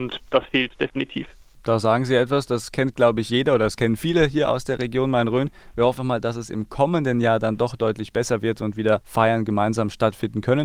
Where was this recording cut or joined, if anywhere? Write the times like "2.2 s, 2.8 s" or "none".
6.0 s